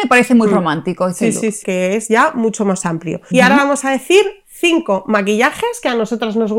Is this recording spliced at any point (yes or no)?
yes